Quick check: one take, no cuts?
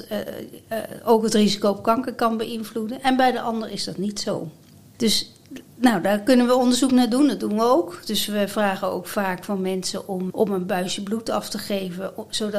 no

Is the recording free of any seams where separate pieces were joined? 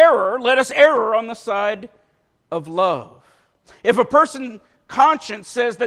yes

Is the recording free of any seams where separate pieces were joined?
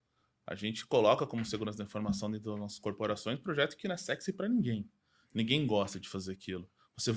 yes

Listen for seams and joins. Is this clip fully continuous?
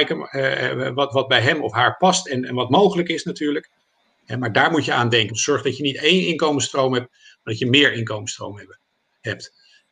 no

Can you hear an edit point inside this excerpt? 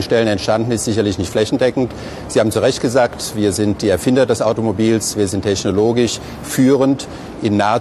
no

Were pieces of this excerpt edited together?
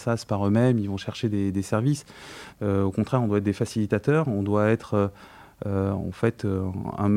yes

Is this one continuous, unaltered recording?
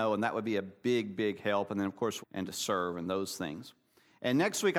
no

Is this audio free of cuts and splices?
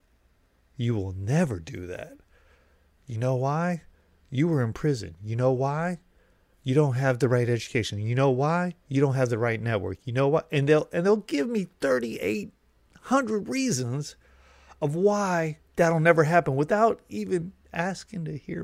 yes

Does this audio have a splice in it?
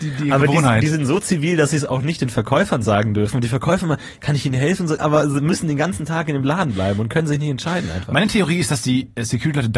yes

